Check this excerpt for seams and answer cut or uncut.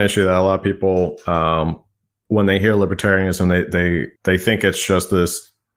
cut